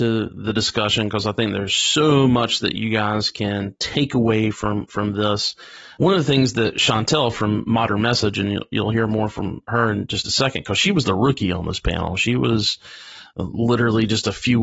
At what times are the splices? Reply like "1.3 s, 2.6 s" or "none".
none